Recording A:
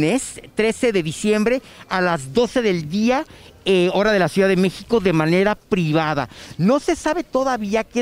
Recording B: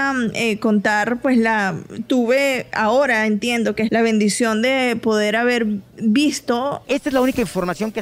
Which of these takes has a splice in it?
B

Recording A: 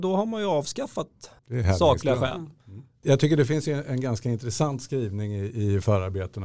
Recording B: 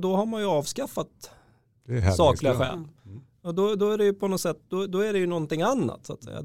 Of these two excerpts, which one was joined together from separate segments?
A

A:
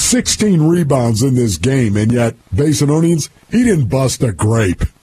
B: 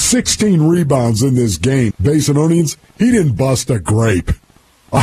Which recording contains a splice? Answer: B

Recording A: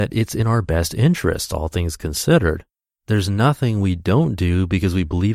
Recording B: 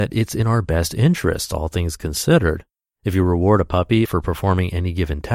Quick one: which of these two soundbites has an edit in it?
B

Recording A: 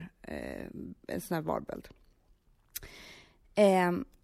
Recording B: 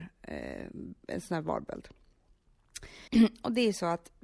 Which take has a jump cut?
B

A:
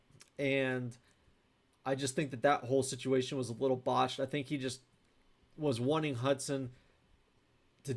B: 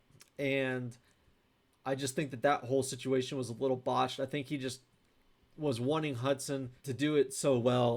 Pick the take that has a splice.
B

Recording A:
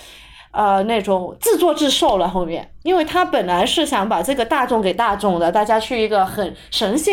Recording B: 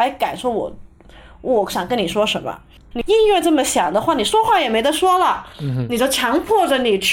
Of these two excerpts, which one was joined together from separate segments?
B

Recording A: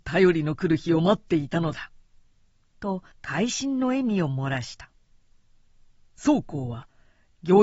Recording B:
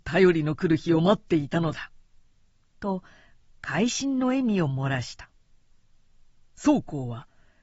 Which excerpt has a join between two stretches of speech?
A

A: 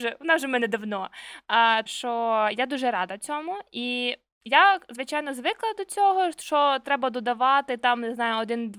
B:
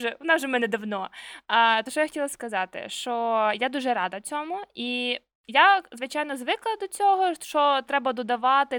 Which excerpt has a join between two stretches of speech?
A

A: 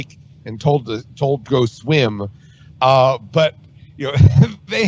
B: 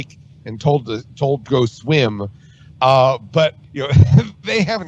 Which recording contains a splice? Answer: B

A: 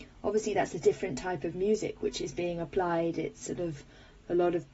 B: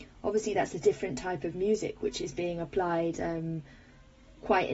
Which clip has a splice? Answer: B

